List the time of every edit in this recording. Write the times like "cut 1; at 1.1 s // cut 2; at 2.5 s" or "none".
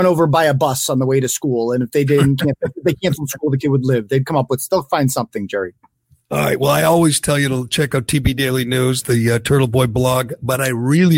none